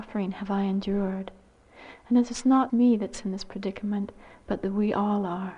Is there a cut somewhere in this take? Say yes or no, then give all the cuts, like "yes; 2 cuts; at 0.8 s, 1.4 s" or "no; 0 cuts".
yes; 1 cut; at 2.7 s